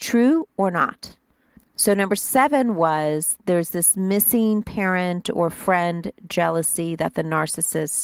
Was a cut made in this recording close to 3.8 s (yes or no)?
no